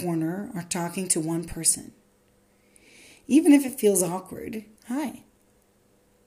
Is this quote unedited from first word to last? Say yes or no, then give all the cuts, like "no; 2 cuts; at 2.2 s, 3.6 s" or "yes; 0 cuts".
no; 1 cut; at 4.8 s